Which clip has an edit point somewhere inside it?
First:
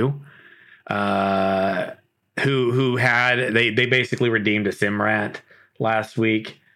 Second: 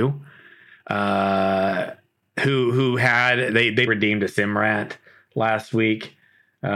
second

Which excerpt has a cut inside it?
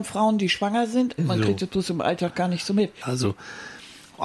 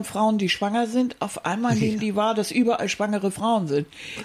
first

